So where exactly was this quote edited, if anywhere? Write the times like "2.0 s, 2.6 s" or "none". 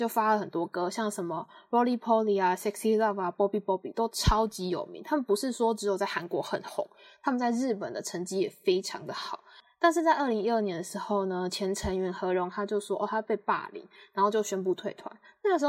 none